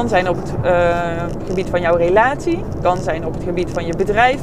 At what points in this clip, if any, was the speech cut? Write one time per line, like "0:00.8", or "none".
none